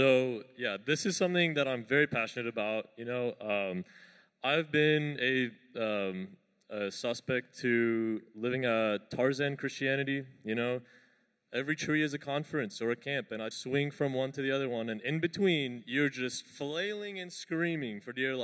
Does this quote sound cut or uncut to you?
cut